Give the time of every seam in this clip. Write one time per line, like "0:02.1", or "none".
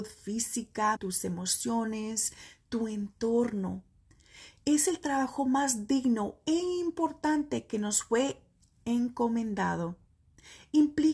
0:01.0